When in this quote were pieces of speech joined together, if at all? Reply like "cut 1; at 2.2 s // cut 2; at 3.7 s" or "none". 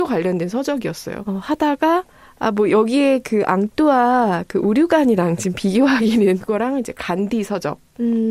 cut 1; at 1.2 s // cut 2; at 6.4 s